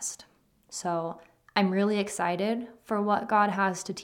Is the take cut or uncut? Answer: uncut